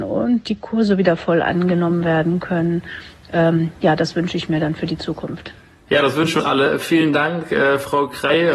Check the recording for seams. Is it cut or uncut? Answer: uncut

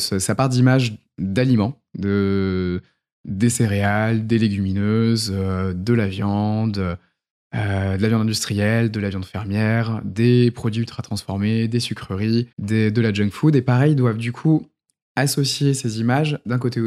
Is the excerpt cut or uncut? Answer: cut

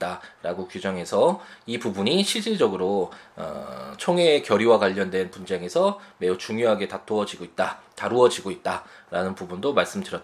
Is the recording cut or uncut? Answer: uncut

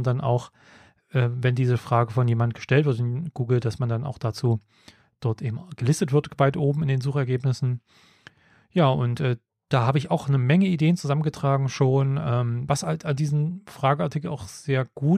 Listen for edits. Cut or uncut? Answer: uncut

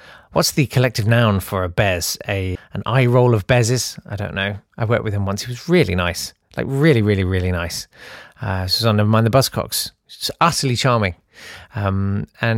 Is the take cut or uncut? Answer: cut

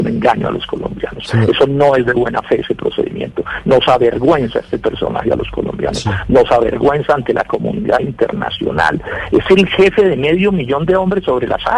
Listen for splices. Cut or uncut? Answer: uncut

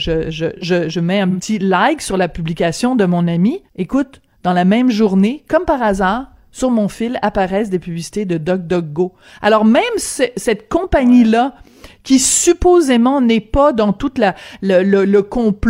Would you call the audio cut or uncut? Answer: cut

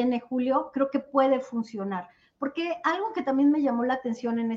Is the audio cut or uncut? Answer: uncut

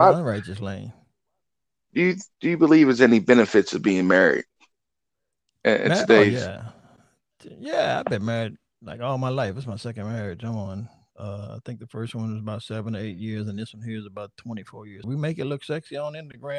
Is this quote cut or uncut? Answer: cut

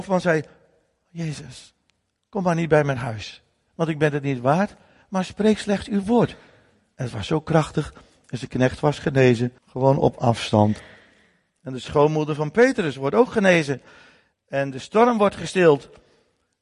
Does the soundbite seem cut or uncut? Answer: cut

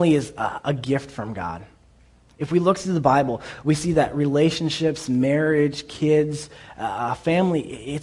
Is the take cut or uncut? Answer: uncut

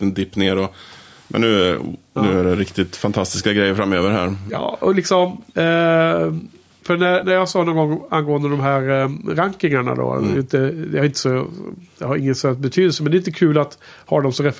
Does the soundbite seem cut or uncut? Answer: uncut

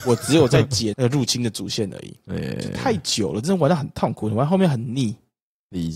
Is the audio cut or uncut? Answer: uncut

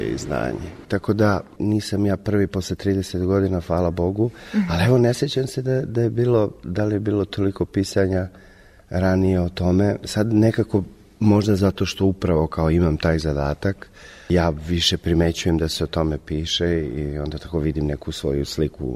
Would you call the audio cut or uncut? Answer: uncut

